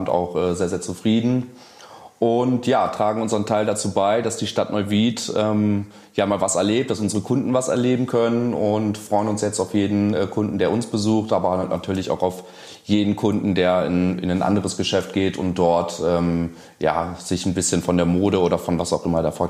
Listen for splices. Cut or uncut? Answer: uncut